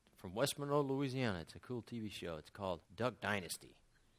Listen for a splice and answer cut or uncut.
cut